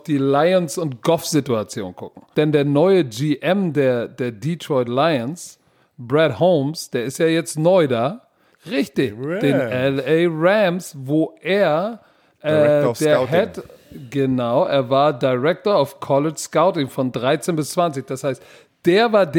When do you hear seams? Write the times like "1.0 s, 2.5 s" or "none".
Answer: 2.3 s, 8.5 s